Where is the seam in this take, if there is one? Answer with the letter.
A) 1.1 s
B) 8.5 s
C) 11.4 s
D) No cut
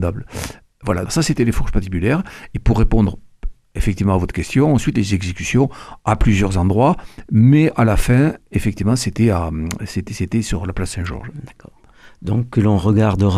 A